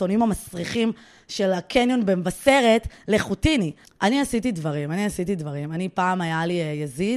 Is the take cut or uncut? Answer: cut